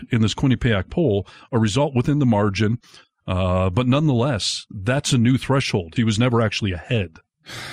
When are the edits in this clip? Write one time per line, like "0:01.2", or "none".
0:06.0